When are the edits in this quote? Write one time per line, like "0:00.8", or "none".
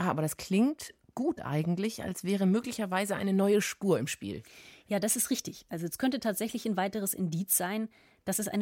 none